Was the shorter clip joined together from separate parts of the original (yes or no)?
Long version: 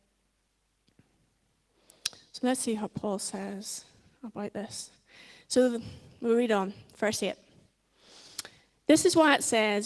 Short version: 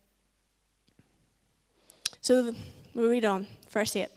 yes